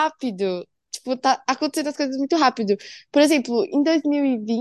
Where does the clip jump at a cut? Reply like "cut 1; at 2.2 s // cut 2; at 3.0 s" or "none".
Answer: none

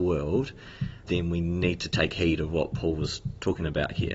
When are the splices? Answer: cut 1; at 1.0 s

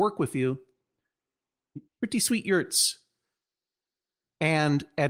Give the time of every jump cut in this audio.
cut 1; at 1.8 s

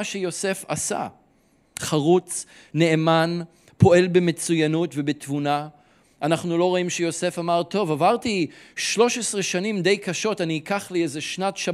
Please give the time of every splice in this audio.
cut 1; at 1.8 s

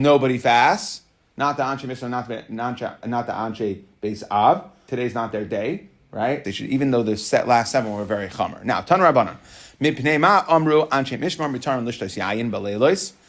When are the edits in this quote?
cut 1; at 4.9 s // cut 2; at 6.4 s

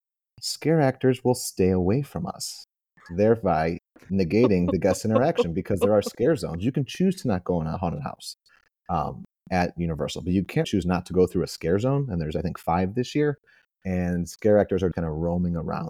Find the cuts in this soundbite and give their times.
cut 1; at 10.6 s // cut 2; at 14.9 s

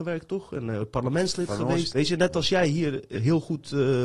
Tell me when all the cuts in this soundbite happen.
cut 1; at 1.9 s

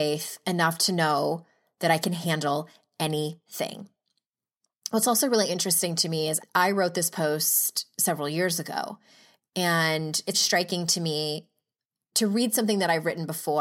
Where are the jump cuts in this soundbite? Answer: cut 1; at 6.4 s // cut 2; at 10.3 s

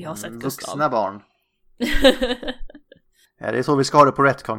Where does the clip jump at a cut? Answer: none

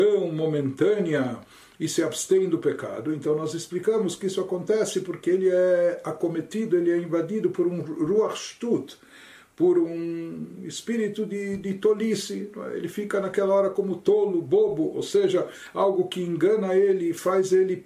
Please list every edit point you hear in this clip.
none

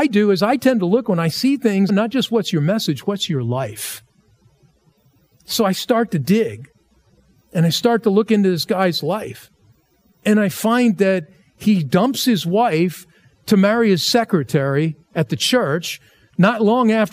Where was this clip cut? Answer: cut 1; at 1.9 s

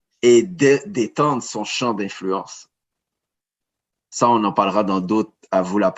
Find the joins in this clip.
none

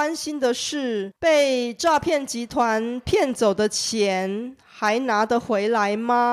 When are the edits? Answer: cut 1; at 1.2 s

